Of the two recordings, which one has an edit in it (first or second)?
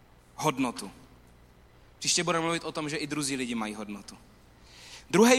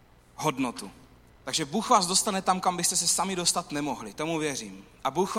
second